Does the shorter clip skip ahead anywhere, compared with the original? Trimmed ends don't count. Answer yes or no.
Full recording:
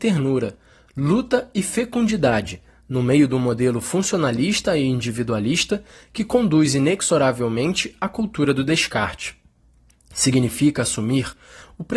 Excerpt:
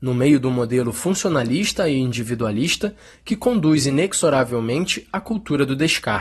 no